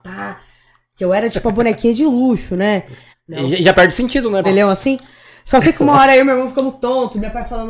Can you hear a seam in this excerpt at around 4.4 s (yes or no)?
yes